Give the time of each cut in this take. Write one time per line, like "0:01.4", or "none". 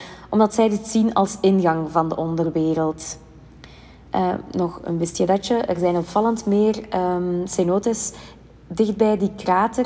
none